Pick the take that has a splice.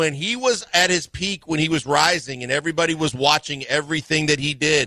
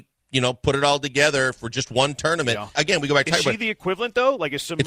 second; 1 cut; at 2.8 s

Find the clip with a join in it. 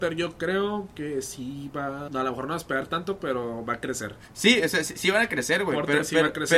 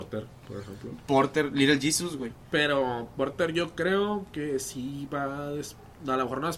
first; 1 cut; at 2.1 s

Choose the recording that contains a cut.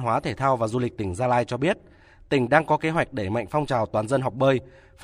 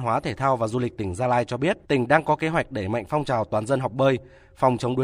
second; 1 cut; at 1.8 s

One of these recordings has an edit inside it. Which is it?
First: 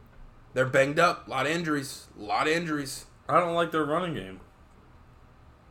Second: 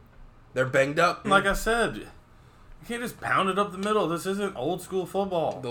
second; 1 cut; at 1.2 s

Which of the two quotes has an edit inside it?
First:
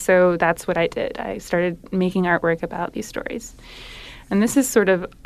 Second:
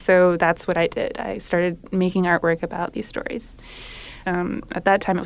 second; 1 cut; at 4.2 s

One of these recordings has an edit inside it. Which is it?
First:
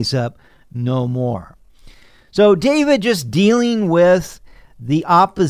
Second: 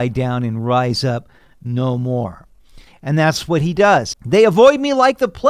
second; 2 cuts; at 2.9 s, 4.1 s

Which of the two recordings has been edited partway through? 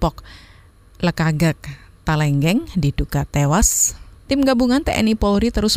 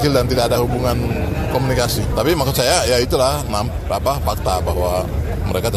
first; 1 cut; at 4.2 s

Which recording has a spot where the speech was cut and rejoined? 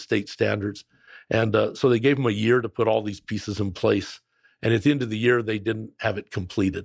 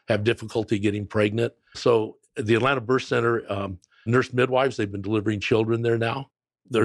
second; 2 cuts; at 1.7 s, 4.1 s

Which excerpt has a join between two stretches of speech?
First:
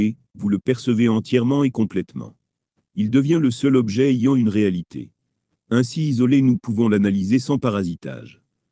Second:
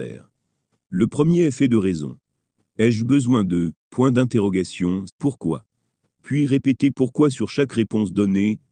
second; 1 cut; at 5.1 s

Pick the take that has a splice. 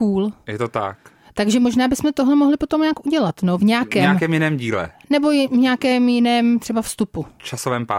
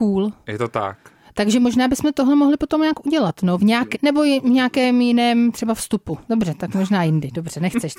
second; 2 cuts; at 3.9 s, 6.3 s

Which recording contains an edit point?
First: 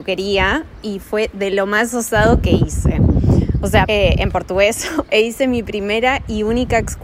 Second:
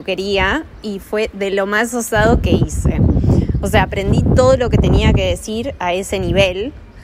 first; 2 cuts; at 3.8 s, 5.1 s

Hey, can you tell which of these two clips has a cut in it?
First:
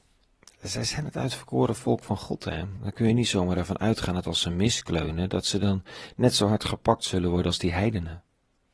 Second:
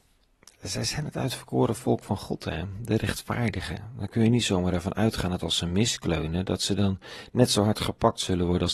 first; 1 cut; at 2.8 s

